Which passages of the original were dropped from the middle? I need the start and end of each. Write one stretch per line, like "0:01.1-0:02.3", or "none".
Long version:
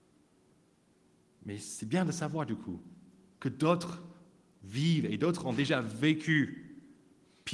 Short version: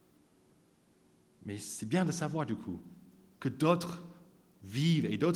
none